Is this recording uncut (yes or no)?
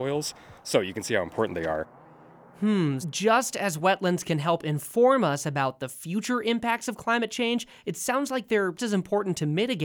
no